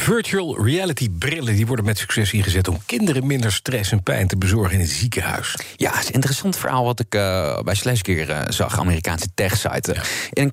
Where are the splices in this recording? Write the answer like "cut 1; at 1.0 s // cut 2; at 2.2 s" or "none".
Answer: none

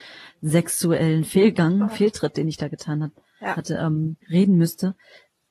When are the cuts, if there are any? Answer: cut 1; at 4.2 s

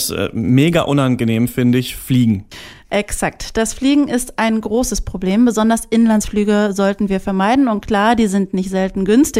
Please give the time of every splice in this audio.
none

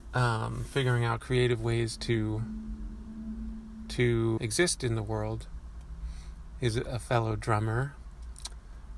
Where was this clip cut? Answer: cut 1; at 4.4 s

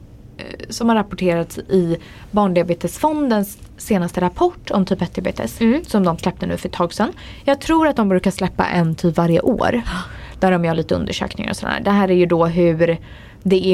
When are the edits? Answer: none

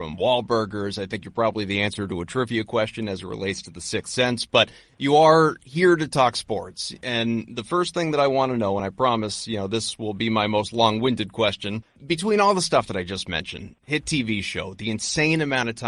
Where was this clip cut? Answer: none

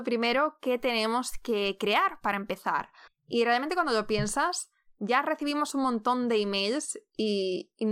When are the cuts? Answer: cut 1; at 3.1 s

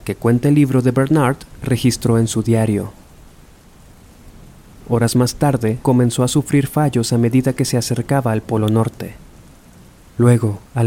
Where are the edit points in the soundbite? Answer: cut 1; at 4.8 s // cut 2; at 5.8 s

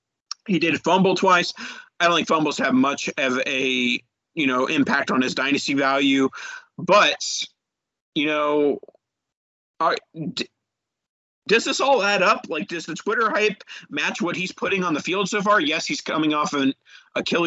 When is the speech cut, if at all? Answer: none

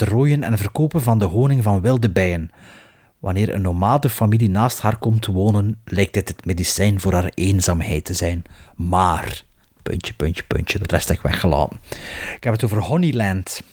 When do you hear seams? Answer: none

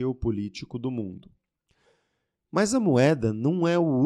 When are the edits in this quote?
none

